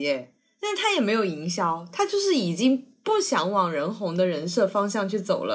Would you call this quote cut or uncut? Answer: uncut